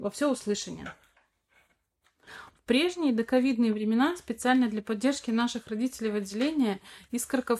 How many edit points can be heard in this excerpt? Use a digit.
1